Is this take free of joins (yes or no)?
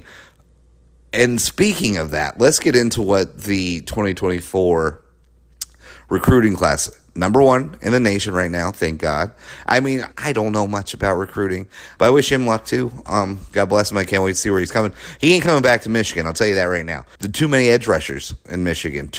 no